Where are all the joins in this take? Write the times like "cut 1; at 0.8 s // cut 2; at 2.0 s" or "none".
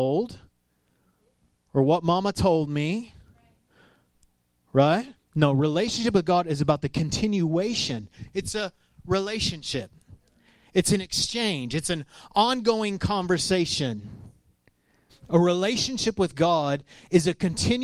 cut 1; at 5.2 s // cut 2; at 15.1 s